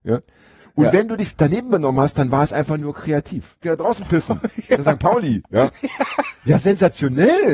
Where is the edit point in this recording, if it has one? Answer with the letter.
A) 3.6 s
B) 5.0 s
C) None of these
A